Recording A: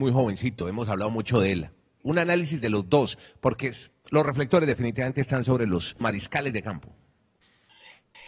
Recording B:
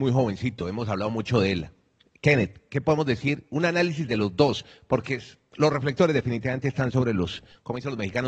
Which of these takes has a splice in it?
A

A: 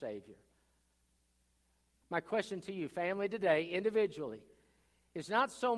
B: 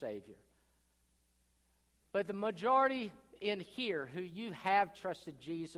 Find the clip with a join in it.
A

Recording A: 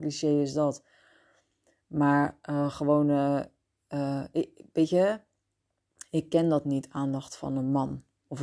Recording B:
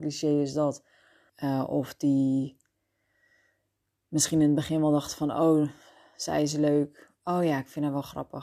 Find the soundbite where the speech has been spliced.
B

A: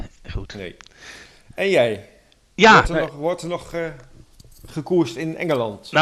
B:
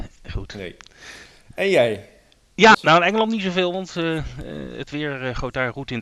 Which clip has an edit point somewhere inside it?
B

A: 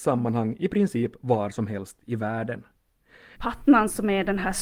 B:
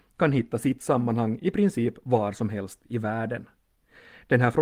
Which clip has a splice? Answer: A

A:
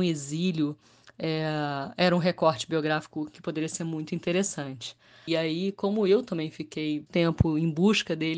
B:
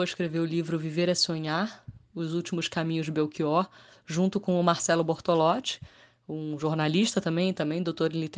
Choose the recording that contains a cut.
A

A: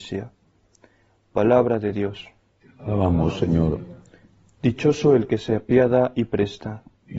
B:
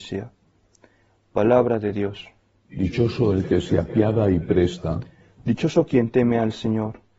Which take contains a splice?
B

